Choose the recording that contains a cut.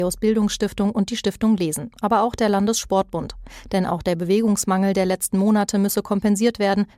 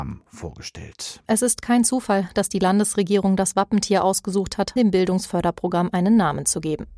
second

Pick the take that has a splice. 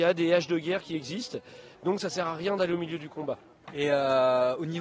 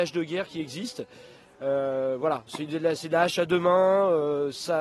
first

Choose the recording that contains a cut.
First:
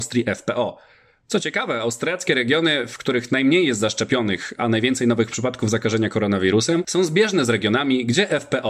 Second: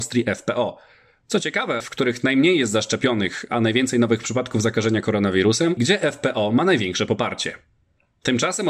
second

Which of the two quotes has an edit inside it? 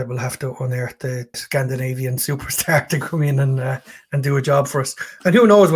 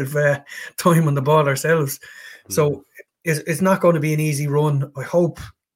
first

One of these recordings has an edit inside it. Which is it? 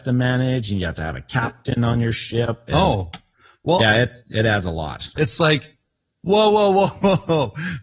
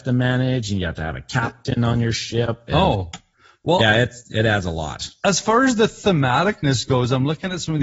first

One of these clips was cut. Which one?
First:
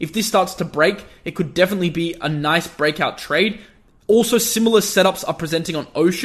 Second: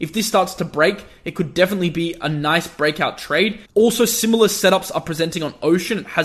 second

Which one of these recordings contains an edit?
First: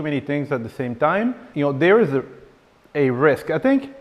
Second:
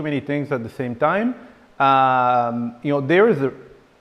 first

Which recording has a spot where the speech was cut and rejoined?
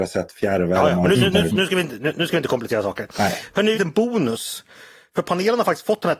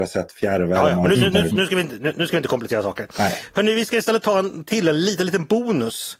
first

